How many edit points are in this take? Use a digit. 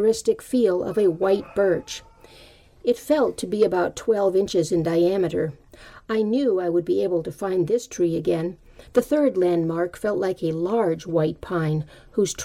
1